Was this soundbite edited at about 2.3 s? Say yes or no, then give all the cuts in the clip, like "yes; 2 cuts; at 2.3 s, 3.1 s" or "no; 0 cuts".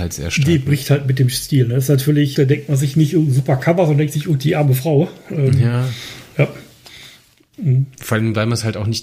yes; 1 cut; at 2.3 s